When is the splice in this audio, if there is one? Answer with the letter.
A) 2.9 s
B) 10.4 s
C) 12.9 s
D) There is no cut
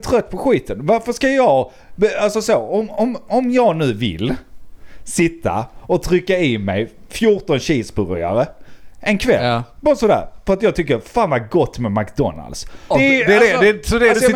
C